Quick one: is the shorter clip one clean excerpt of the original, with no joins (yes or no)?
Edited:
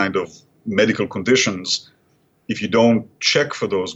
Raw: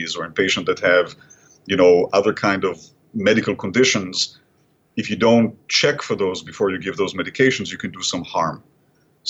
yes